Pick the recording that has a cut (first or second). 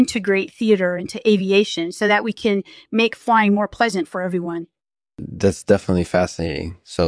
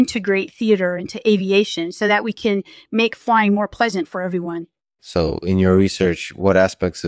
second